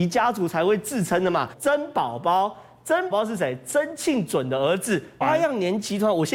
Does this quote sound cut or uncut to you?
cut